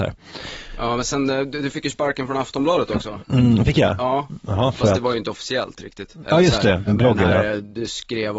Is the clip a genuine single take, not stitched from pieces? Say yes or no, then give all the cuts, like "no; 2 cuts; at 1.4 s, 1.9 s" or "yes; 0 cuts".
no; 1 cut; at 6.9 s